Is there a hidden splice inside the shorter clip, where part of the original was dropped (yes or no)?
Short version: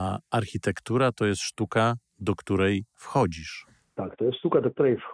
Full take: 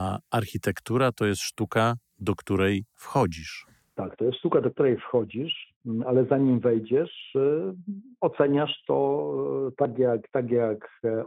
no